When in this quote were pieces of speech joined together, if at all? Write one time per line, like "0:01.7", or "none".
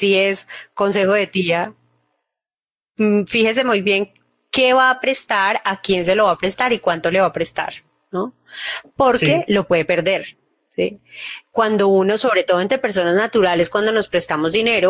none